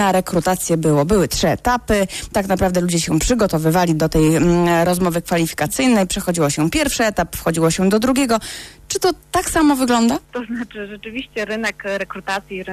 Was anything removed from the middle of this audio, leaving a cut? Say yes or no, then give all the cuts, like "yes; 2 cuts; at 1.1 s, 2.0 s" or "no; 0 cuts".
yes; 1 cut; at 10.2 s